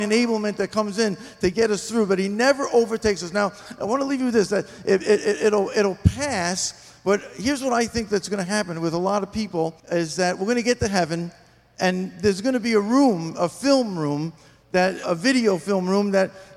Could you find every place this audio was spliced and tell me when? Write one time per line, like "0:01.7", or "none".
0:09.8
0:15.0